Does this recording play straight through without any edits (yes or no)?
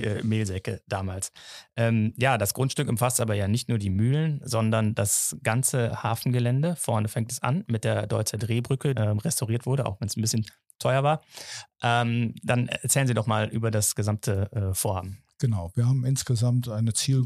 no